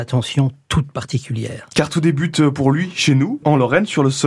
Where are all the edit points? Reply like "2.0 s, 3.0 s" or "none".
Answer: none